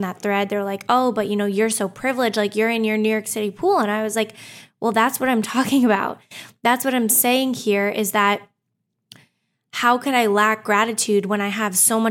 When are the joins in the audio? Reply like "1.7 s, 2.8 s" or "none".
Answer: none